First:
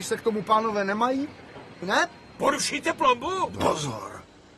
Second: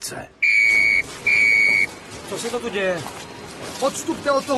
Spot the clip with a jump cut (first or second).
first